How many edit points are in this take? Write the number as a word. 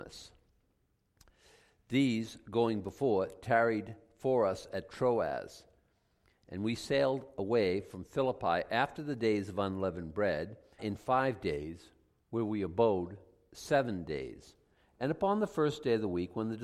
one